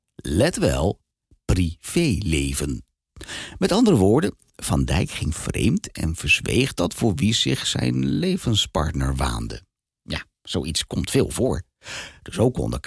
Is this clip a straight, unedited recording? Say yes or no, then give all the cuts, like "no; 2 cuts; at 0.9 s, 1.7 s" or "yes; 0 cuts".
yes; 0 cuts